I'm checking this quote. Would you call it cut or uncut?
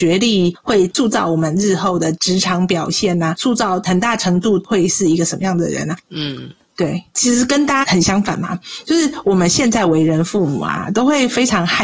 cut